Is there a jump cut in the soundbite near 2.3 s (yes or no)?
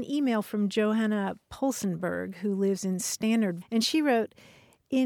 no